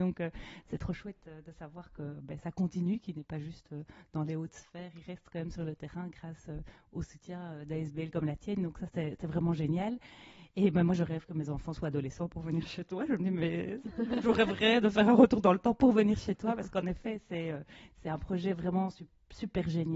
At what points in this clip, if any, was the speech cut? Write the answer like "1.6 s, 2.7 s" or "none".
none